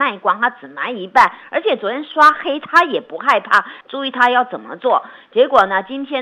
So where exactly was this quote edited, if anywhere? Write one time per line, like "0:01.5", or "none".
0:03.8